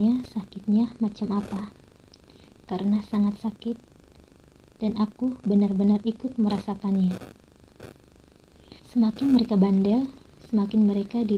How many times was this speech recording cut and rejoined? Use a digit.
1